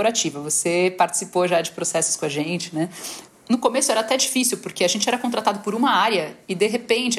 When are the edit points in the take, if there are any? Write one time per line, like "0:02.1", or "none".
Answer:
0:03.3